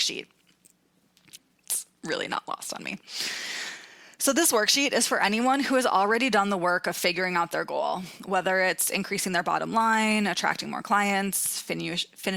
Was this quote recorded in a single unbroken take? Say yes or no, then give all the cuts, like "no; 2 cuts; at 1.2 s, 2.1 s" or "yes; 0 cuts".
no; 1 cut; at 1.4 s